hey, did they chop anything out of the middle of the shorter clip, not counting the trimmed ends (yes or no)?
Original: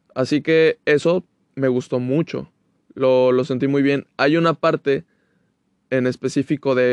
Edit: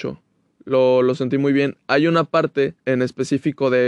yes